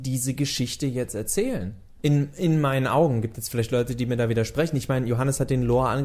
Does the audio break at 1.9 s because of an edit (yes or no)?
no